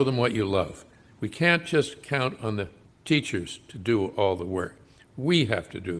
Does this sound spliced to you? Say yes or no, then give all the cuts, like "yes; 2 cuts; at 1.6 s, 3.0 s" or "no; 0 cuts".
yes; 1 cut; at 1.0 s